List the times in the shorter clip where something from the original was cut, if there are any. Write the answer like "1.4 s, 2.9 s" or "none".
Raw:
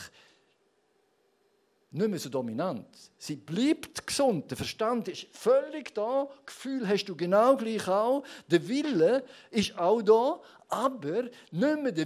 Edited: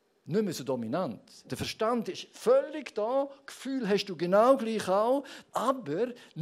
1.4 s, 5.5 s